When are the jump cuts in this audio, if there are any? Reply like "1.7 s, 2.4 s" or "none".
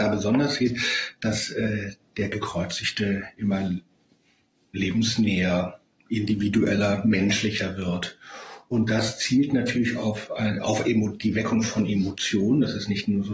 none